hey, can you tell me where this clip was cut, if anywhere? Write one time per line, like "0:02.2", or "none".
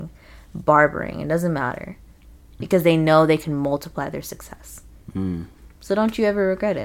0:02.6